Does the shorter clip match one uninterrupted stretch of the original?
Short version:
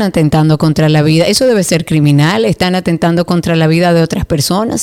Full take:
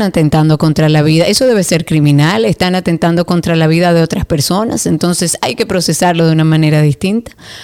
yes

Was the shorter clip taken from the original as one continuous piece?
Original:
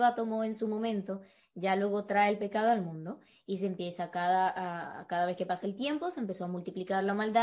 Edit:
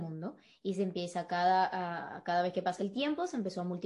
yes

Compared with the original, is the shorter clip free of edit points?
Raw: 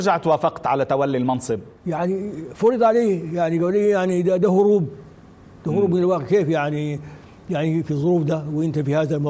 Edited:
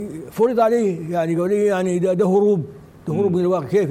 no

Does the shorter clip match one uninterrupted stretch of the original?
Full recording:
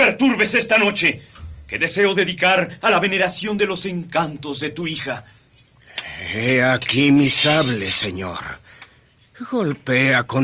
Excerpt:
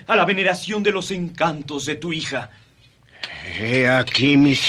yes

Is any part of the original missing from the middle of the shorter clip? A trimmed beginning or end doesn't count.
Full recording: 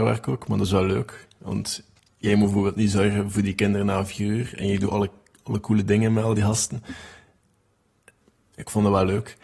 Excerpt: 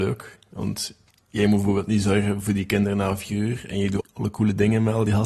yes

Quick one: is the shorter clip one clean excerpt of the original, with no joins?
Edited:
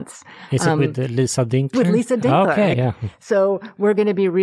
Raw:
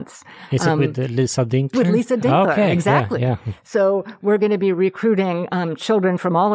no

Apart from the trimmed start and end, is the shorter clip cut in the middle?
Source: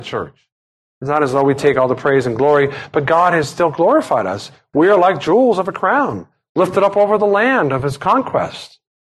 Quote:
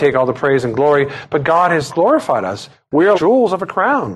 yes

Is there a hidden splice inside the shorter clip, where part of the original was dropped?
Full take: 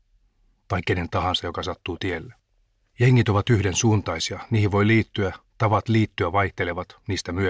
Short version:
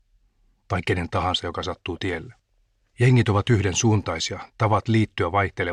yes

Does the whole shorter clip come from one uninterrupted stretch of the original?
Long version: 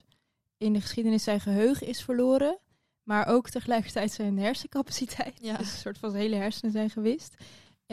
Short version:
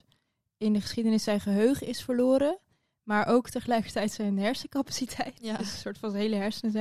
yes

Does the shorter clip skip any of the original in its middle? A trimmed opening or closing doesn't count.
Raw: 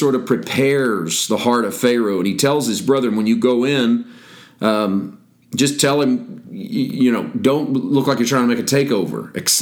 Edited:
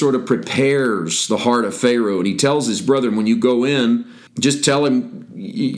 yes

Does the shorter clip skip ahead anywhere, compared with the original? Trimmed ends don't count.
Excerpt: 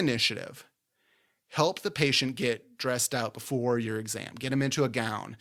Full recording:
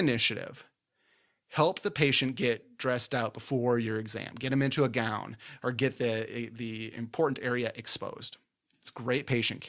no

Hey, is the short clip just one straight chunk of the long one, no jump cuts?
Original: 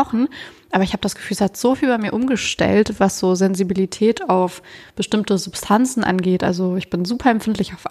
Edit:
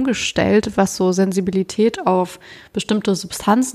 yes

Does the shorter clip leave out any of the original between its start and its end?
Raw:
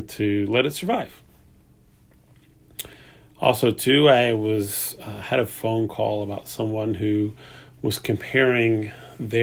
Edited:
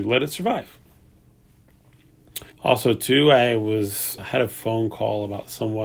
yes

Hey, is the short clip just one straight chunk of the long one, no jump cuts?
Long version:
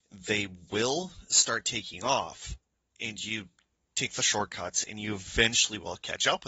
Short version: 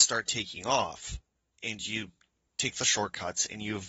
yes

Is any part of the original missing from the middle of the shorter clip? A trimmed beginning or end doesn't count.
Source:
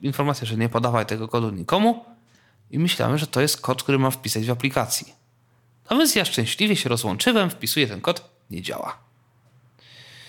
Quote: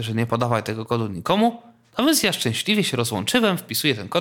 yes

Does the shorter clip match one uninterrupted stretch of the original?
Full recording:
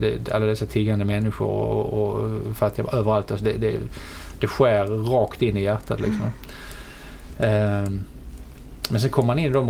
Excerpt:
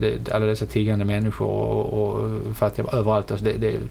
yes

